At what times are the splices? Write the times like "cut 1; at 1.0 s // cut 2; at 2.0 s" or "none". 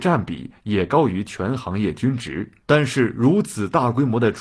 cut 1; at 2.6 s